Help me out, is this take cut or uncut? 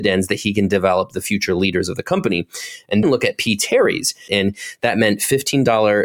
cut